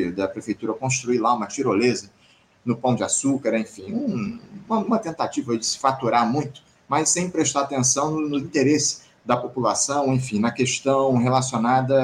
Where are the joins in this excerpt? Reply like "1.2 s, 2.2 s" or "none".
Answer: none